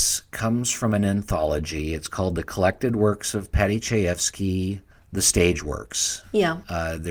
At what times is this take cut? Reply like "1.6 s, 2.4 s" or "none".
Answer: none